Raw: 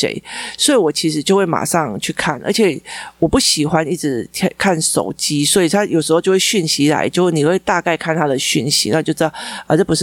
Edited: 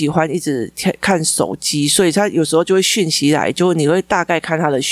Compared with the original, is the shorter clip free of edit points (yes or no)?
yes